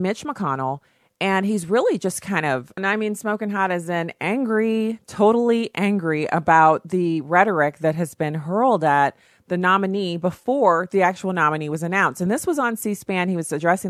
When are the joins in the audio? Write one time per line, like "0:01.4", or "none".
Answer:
0:02.8